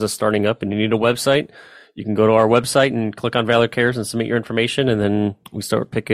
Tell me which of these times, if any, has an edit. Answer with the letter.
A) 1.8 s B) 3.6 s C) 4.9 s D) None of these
D